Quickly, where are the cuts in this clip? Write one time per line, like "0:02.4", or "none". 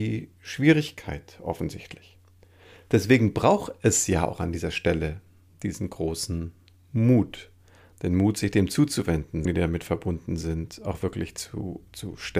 0:09.5